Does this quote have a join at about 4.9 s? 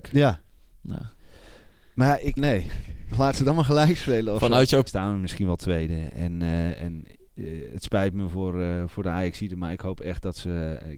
yes; 2 cuts; at 2.4 s, 4.9 s

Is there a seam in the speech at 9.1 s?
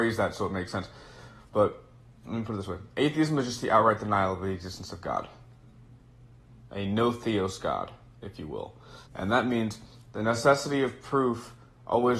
yes; 1 cut; at 9.1 s

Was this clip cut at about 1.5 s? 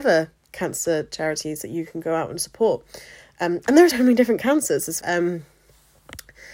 no; 2 cuts; at 3.9 s, 5.0 s

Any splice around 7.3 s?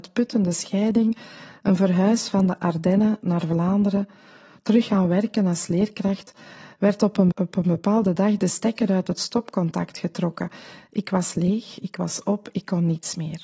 yes; 1 cut; at 7.3 s

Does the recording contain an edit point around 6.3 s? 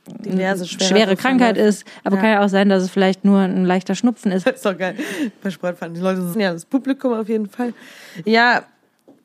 yes; 2 cuts; at 4.4 s, 6.3 s

